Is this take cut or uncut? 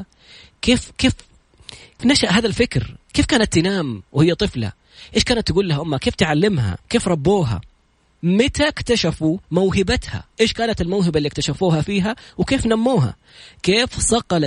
cut